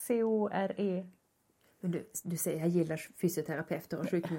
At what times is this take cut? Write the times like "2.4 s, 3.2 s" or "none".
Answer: none